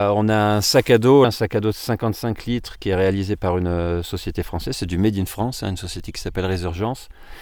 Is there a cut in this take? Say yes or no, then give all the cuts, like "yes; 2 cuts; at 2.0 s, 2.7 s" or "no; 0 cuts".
yes; 1 cut; at 1.2 s